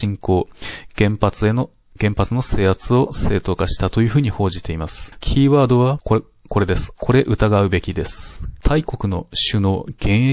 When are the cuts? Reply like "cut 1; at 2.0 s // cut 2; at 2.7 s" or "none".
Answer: cut 1; at 5.2 s // cut 2; at 7.0 s // cut 3; at 8.6 s